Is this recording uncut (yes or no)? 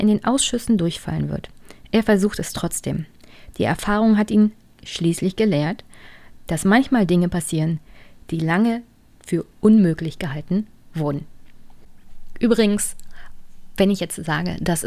yes